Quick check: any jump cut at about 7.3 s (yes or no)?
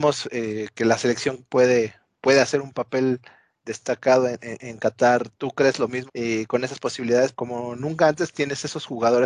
yes